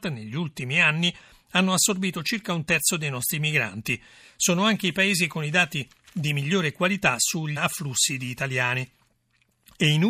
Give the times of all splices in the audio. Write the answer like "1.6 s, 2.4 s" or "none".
7.6 s